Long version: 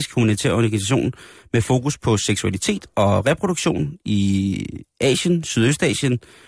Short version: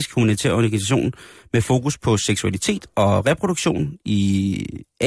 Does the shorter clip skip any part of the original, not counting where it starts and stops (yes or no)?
no